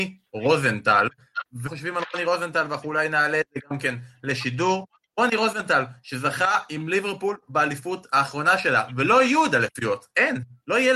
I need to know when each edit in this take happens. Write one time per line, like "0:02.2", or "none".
none